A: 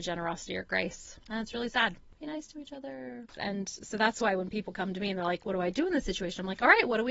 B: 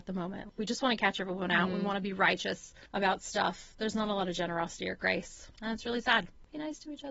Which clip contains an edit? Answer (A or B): A